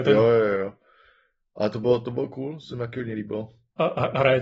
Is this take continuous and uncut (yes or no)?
yes